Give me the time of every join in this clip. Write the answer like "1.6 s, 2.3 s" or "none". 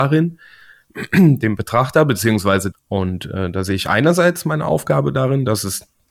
2.7 s